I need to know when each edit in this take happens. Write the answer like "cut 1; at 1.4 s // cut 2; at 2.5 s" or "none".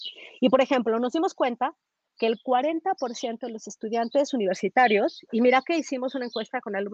none

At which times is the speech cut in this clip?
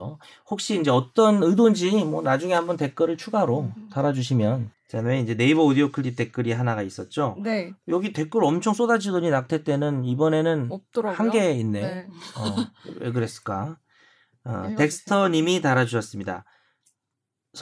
cut 1; at 4.7 s

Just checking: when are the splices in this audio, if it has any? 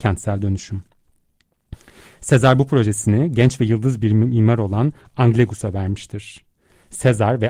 none

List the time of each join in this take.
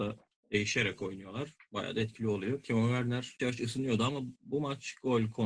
cut 1; at 3.4 s

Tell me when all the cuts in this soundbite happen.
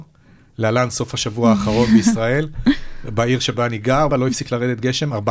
cut 1; at 4.1 s

